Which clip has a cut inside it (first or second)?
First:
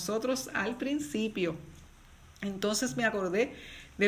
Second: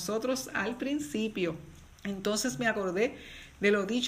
second